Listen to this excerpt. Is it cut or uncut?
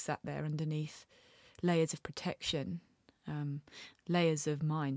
uncut